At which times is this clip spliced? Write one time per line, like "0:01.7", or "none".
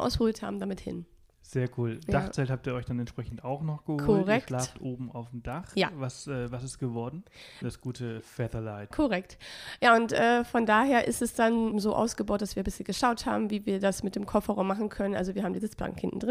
0:07.6
0:08.9
0:11.7

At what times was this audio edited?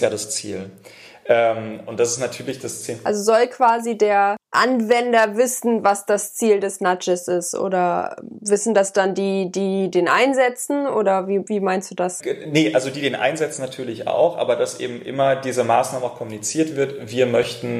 none

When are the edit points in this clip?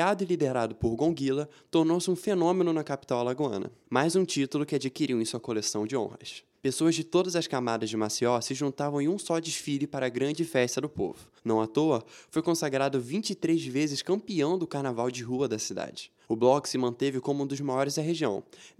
none

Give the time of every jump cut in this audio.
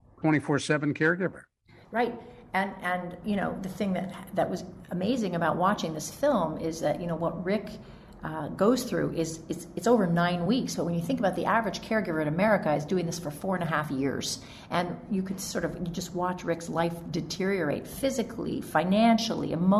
none

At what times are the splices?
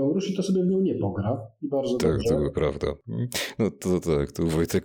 none

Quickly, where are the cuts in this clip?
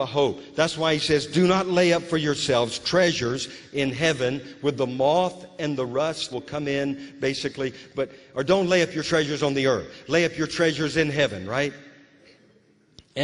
0:06.3

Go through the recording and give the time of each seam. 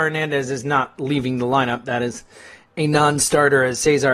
none

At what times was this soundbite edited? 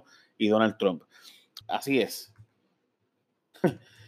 0:01.6

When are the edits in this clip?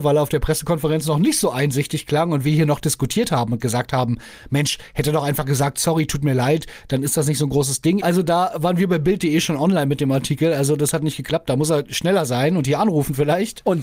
0:08.0

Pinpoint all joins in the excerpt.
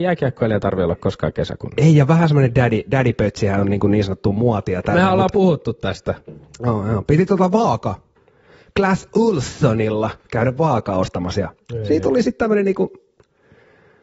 none

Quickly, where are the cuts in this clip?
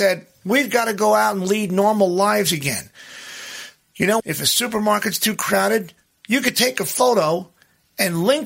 0:04.2

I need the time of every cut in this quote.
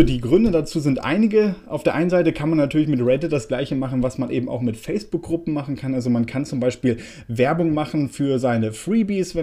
none

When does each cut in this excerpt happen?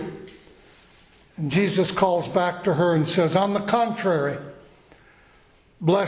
none

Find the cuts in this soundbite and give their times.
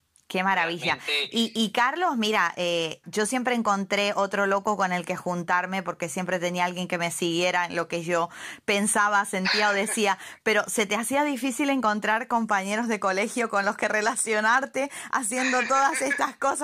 0:03.0

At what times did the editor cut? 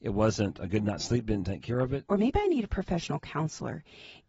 0:02.1

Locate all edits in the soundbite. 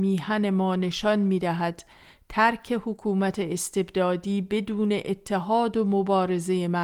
none

